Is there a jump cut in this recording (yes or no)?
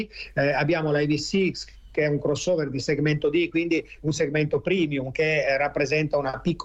no